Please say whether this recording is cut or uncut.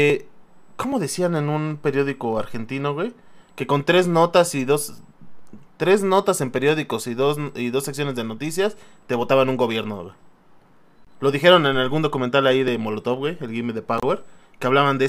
uncut